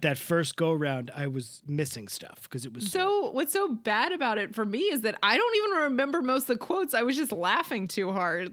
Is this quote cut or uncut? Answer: cut